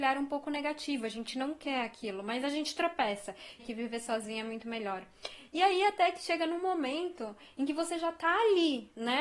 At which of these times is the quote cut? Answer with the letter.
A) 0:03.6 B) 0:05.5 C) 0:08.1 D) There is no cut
A